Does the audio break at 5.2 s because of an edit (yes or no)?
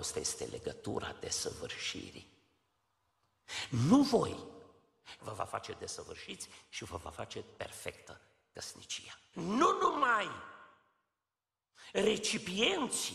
yes